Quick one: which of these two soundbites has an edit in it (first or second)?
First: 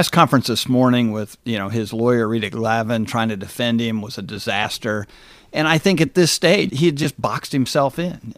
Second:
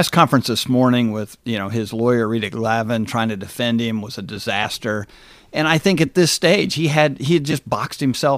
first